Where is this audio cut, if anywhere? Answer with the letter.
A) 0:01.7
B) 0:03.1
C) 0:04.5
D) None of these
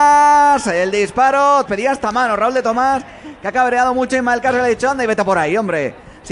A